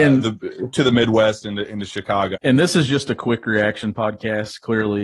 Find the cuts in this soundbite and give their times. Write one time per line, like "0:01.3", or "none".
0:02.3

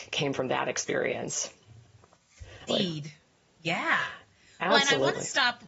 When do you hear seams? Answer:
0:02.7

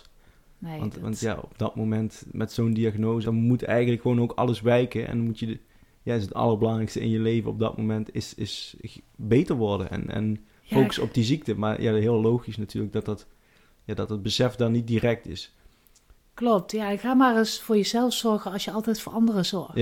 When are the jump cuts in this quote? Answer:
0:03.2

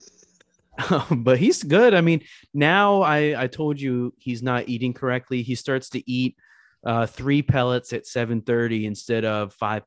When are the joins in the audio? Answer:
none

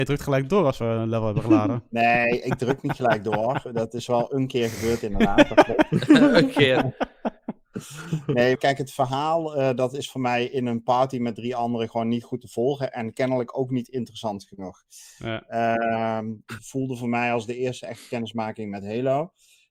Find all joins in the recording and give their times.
0:08.5
0:16.6

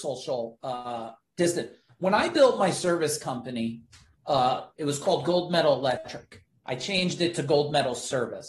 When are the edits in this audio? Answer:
0:01.9

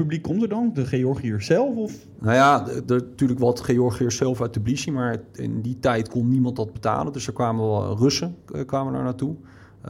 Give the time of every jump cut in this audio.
none

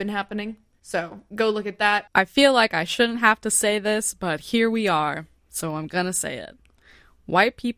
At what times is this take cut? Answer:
0:02.1

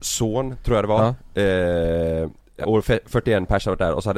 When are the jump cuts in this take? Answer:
0:02.6

